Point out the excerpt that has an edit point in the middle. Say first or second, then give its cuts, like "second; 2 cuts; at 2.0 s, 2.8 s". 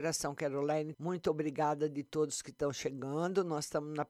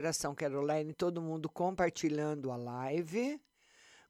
first; 1 cut; at 0.9 s